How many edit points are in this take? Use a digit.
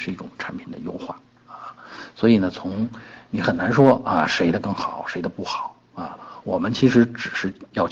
0